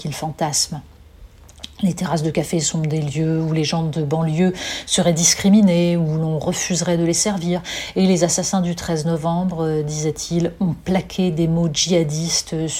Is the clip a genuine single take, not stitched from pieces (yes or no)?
yes